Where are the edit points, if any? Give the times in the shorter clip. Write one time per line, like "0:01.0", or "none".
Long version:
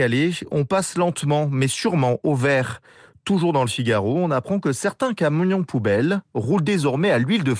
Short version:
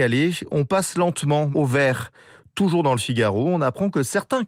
0:01.5